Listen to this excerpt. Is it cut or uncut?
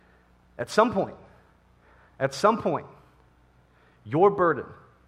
uncut